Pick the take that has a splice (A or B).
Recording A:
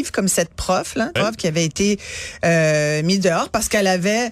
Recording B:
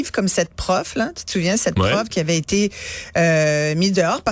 A